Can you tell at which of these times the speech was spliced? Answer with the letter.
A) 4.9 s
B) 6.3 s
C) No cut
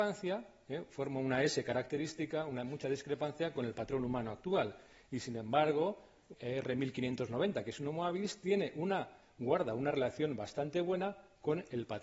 B